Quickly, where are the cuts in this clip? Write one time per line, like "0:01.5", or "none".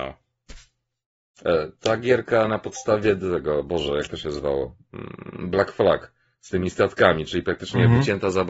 none